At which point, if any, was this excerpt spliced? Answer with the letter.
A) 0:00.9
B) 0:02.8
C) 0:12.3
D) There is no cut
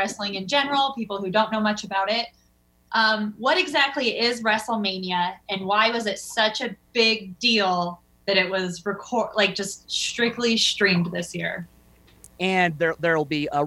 C